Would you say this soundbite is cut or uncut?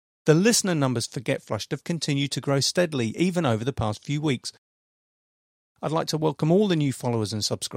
uncut